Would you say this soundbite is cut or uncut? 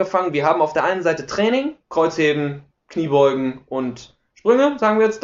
cut